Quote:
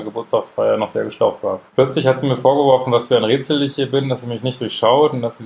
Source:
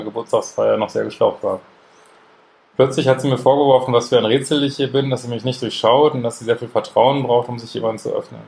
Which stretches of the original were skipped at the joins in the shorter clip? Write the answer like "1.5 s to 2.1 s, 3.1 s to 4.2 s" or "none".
1.7 s to 2.7 s